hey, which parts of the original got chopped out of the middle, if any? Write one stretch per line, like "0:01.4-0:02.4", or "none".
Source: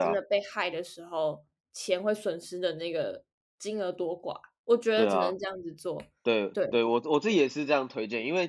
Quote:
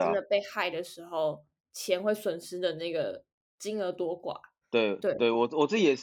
0:04.6-0:06.1

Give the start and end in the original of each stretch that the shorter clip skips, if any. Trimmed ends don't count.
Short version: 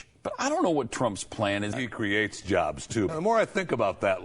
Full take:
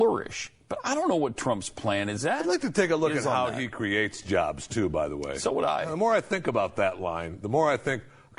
0:02.2-0:03.5
0:04.9-0:05.8

